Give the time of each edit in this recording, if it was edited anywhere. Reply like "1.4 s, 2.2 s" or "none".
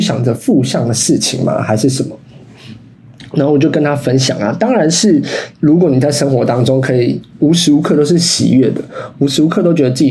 9.1 s

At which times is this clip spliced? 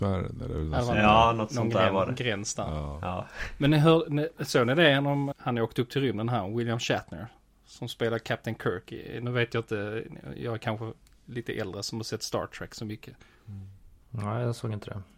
5.3 s

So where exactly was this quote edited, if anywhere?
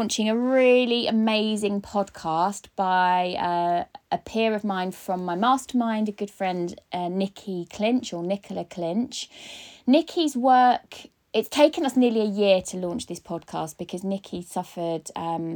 none

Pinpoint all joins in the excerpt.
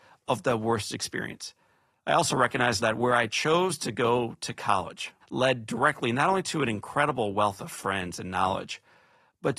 2.8 s, 5.2 s

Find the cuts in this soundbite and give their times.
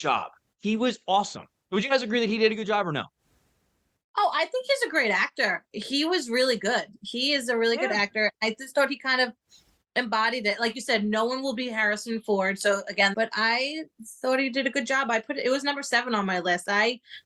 13.1 s

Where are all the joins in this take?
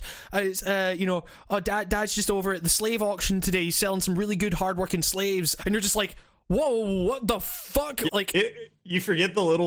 5.6 s, 8.1 s

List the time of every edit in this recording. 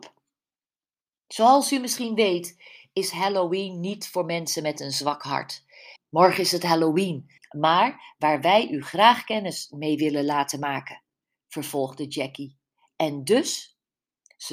6.0 s, 7.4 s

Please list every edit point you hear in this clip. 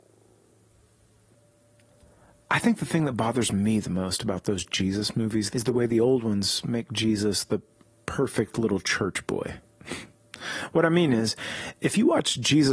5.5 s

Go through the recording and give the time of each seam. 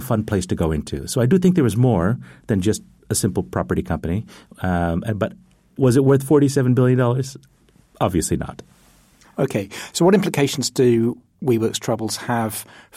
none

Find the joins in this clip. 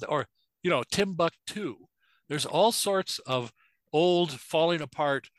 none

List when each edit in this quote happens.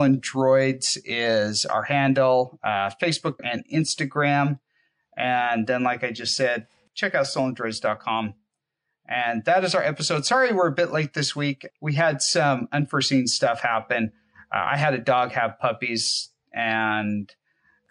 3.4 s

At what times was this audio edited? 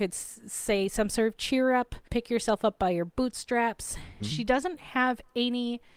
2.0 s, 4.2 s

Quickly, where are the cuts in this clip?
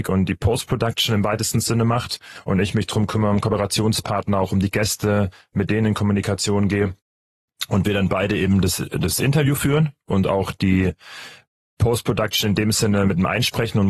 none

